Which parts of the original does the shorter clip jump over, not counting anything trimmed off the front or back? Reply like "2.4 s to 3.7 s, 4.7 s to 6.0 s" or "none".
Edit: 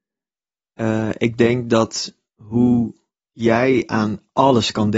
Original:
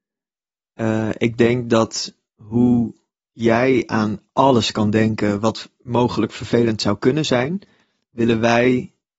none